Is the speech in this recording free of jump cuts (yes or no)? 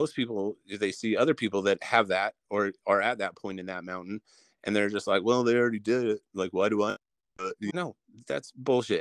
no